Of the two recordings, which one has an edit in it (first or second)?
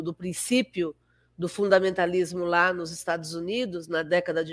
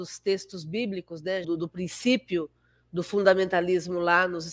second